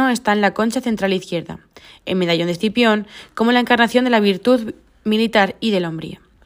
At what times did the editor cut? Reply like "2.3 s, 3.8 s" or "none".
none